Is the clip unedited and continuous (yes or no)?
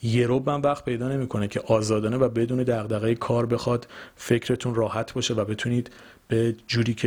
yes